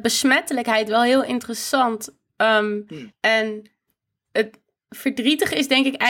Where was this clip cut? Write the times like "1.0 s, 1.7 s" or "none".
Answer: 3.1 s